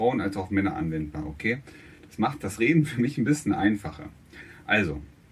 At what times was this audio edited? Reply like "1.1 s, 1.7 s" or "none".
none